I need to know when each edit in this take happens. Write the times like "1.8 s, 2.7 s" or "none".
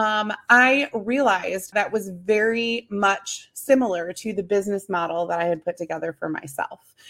1.7 s